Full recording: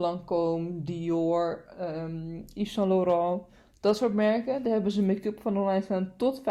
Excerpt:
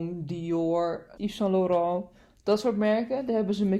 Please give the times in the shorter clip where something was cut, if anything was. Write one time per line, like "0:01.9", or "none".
0:01.2